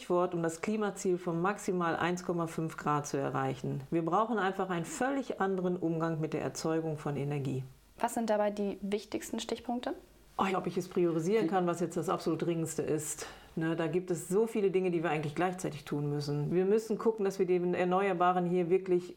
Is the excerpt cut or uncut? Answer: cut